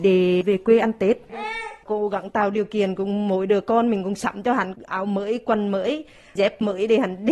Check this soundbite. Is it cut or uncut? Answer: cut